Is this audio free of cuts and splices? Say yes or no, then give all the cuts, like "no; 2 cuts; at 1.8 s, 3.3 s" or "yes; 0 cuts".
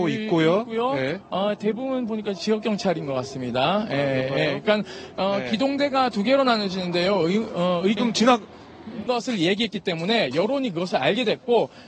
no; 2 cuts; at 8.0 s, 9.1 s